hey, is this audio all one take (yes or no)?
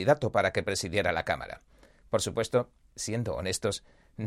no